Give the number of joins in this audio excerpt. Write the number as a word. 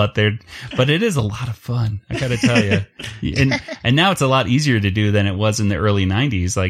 zero